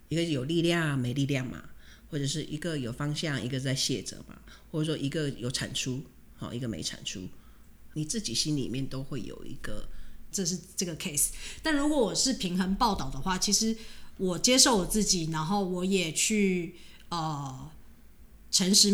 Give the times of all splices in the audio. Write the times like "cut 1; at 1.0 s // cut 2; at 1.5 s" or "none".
cut 1; at 7.9 s // cut 2; at 10.3 s